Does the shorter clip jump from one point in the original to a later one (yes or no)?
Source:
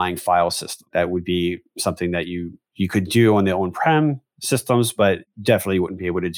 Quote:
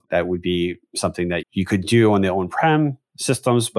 yes